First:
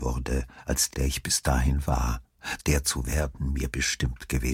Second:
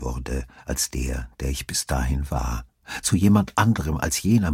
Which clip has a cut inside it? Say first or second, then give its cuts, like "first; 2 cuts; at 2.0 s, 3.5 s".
first; 2 cuts; at 0.9 s, 2.6 s